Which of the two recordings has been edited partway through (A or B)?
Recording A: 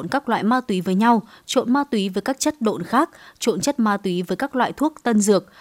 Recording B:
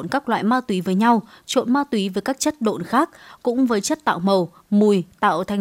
B